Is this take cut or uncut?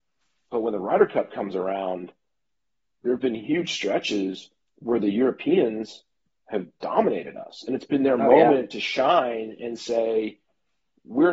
cut